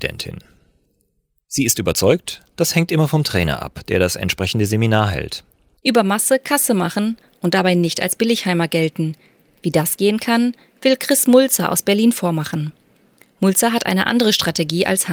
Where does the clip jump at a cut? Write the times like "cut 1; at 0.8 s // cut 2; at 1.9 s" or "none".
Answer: none

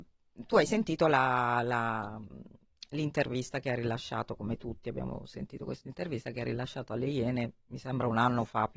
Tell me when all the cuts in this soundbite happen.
none

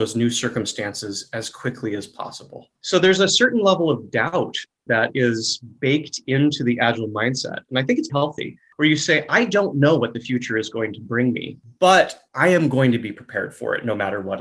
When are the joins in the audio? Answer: cut 1; at 2.7 s // cut 2; at 4.9 s // cut 3; at 8.1 s

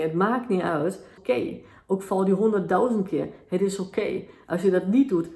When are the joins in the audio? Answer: cut 1; at 1.2 s

